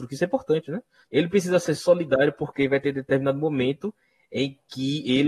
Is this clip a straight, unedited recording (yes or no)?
no